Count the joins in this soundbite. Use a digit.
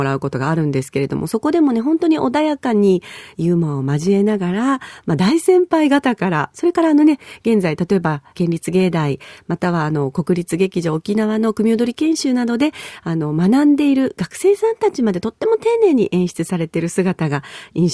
2